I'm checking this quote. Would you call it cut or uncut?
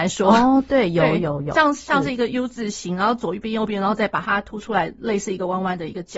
uncut